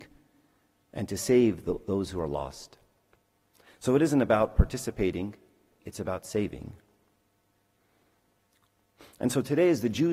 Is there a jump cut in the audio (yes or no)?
yes